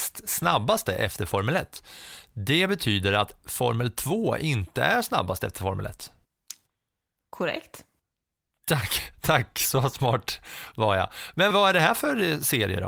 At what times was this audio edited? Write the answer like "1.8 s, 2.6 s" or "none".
11.5 s